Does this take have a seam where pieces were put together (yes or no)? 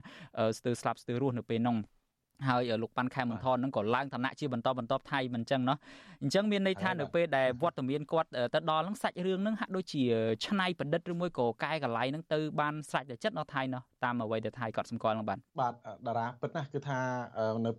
yes